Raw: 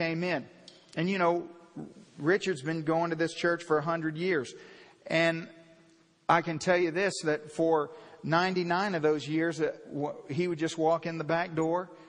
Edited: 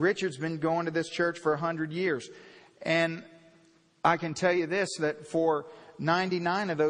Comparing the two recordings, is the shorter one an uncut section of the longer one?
yes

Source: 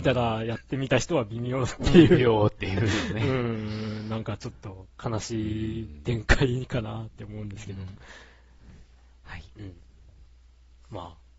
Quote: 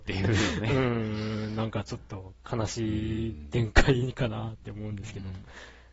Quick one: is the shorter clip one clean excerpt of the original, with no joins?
yes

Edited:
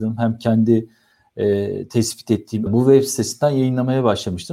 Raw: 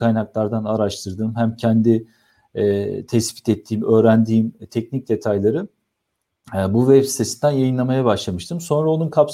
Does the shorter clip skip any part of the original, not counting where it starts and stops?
yes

